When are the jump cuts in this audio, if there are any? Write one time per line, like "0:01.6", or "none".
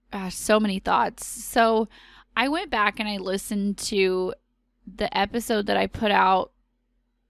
none

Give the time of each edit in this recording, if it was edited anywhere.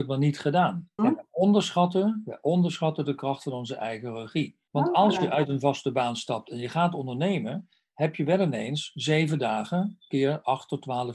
0:01.0
0:04.7

